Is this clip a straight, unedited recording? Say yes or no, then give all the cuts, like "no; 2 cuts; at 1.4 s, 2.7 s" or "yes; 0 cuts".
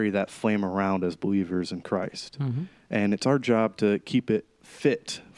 yes; 0 cuts